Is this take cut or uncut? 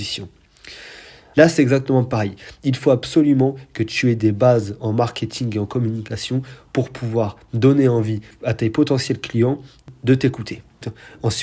cut